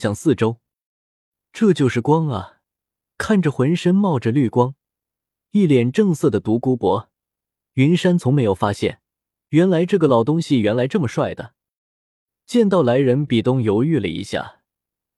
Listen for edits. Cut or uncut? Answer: cut